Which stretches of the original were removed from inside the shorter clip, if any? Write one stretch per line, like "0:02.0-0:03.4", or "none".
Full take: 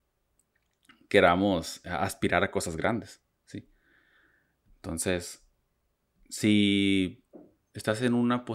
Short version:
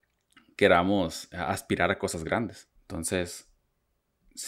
0:03.3-0:04.7

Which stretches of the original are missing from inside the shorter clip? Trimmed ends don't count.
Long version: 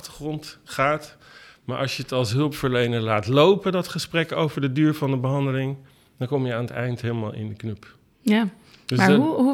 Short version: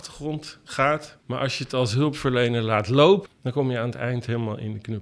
0:01.2-0:01.6
0:03.6-0:06.0

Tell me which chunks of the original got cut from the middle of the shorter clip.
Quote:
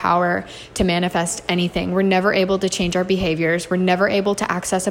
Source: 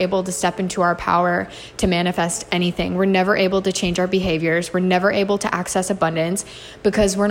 none

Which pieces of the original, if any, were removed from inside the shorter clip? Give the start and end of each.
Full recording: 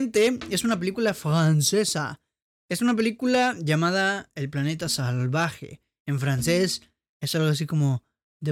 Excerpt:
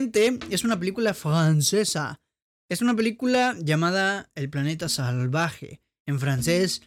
none

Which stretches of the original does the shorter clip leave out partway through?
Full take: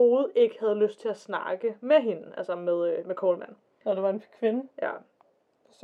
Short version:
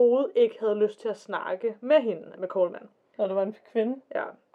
0:02.3-0:03.0

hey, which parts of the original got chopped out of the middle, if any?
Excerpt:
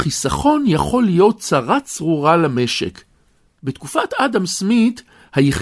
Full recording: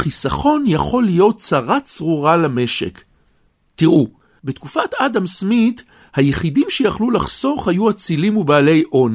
0:03.6-0:04.4

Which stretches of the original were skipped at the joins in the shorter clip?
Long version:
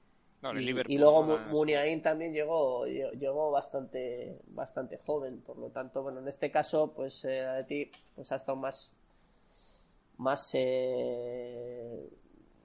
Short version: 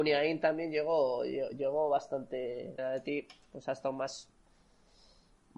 0:04.4-0:07.4

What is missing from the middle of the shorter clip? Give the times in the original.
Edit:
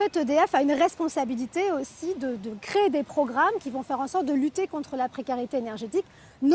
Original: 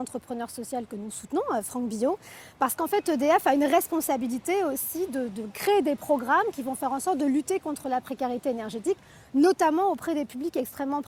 none

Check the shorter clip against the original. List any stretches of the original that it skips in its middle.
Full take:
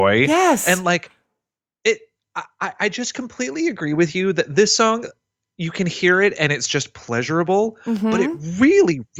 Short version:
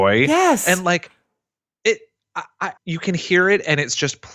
0:02.8-0:05.5

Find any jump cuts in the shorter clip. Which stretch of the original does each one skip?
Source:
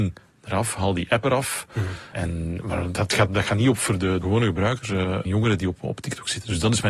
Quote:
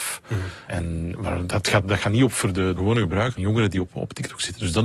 0:04.8-0:05.2

